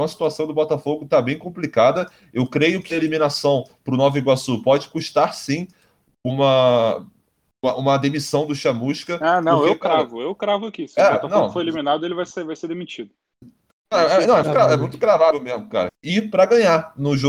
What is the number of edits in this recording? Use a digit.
2